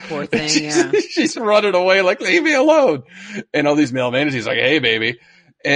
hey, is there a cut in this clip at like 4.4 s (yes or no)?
no